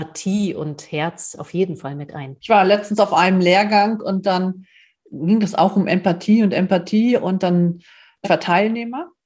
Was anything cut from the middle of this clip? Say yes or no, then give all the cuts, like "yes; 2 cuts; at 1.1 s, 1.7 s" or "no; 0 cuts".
yes; 2 cuts; at 2.4 s, 8.2 s